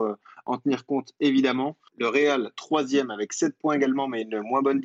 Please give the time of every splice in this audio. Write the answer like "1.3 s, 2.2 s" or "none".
1.9 s